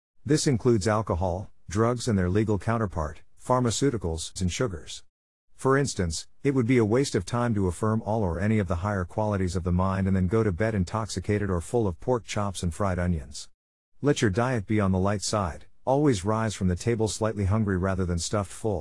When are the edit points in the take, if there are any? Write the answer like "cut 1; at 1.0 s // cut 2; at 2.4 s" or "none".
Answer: cut 1; at 4.4 s